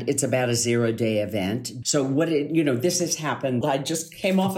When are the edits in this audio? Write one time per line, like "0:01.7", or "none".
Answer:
0:01.8
0:03.6